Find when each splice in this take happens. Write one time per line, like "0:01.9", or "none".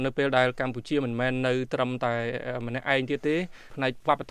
none